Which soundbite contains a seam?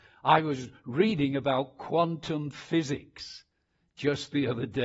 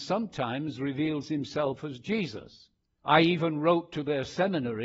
second; 1 cut; at 3.0 s

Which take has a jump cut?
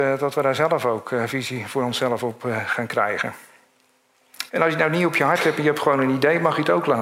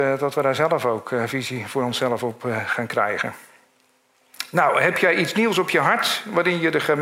first; 1 cut; at 4.5 s

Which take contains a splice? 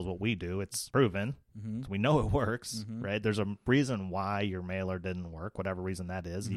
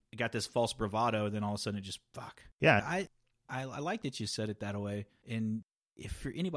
second; 1 cut; at 2.8 s

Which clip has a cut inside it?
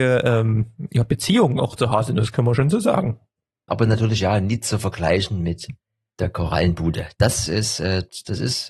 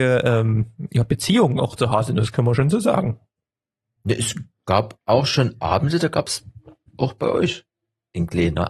first; 1 cut; at 3.7 s

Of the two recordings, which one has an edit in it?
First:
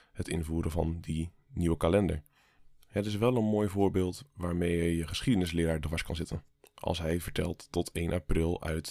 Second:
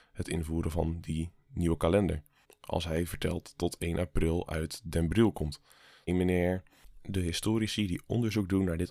second; 2 cuts; at 2.4 s, 6.1 s

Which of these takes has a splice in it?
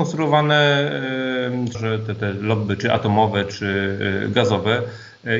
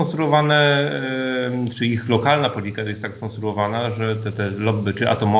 first; 1 cut; at 1.7 s

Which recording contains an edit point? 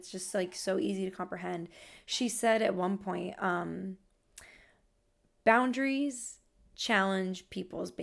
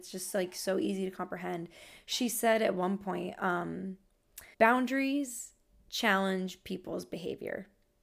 second; 1 cut; at 4.5 s

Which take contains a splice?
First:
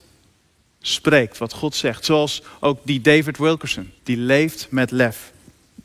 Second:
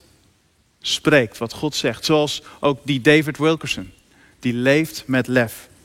first; 1 cut; at 4.0 s

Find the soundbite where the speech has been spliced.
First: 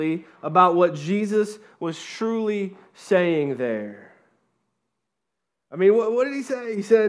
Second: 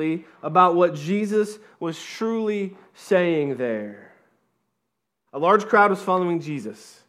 second; 1 cut; at 5.3 s

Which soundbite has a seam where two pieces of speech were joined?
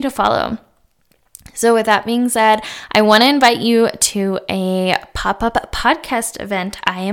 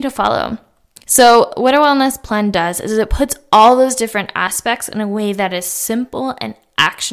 second; 1 cut; at 1.0 s

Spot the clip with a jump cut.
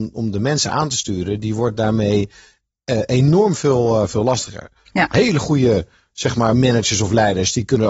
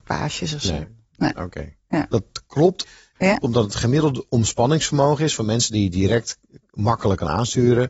second; 1 cut; at 3.2 s

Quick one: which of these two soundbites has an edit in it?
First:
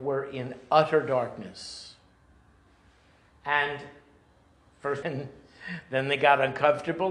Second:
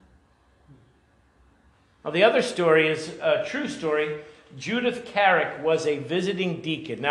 first; 1 cut; at 5.0 s

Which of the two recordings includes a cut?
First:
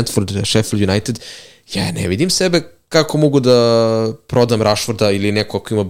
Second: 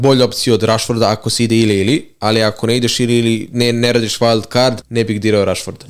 second; 1 cut; at 4.8 s

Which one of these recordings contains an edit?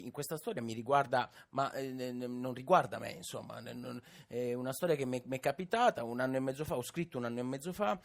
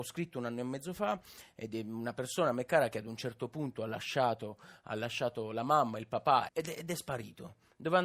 second; 1 cut; at 6.5 s

